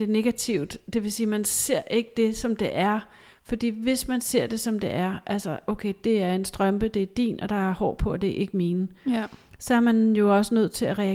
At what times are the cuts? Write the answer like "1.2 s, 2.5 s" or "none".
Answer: none